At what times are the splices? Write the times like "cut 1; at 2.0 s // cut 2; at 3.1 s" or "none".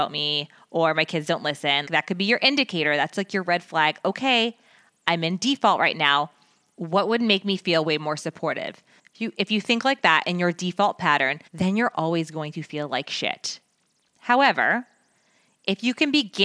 cut 1; at 1.9 s // cut 2; at 9.0 s // cut 3; at 11.5 s